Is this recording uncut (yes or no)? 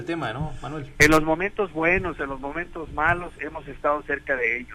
no